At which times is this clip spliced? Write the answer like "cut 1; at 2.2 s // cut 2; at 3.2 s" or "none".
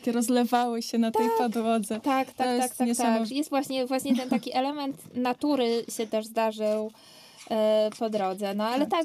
cut 1; at 3.3 s